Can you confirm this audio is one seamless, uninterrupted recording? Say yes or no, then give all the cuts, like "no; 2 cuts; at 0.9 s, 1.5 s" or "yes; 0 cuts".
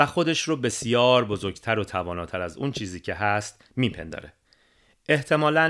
yes; 0 cuts